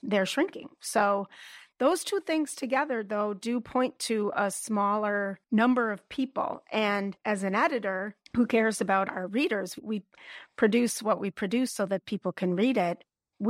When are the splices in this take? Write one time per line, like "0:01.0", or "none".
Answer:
0:05.4
0:08.3